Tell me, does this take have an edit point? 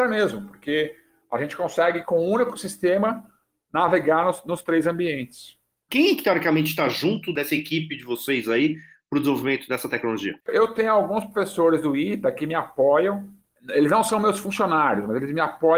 yes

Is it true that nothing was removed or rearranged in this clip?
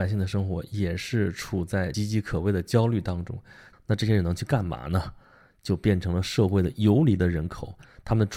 no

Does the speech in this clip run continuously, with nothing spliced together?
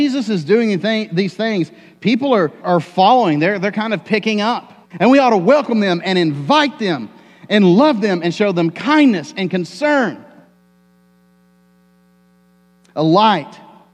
no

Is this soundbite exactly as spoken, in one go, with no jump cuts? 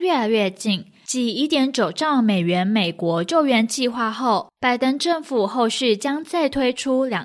yes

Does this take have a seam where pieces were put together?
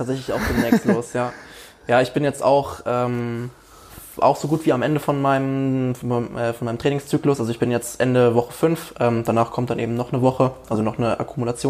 no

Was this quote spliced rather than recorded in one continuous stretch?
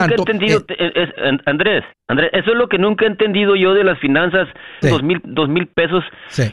yes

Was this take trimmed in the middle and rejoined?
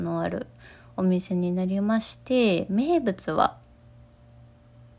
no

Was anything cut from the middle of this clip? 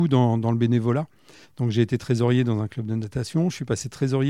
yes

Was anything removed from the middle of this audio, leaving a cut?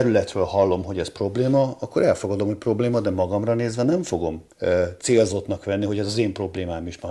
yes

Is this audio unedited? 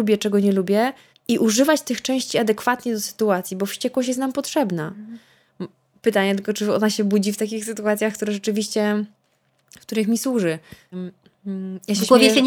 no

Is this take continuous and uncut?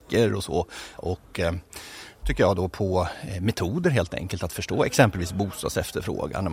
no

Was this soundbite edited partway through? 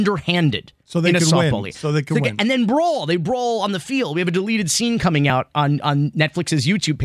no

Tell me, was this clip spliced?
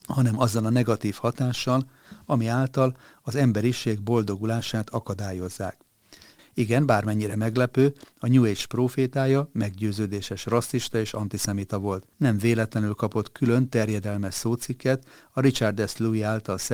yes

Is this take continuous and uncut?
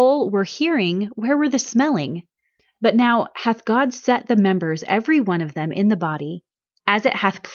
yes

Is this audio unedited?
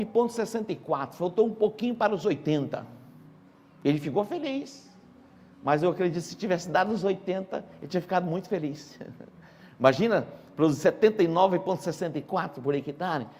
yes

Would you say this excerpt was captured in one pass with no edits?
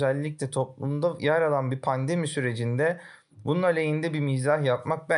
yes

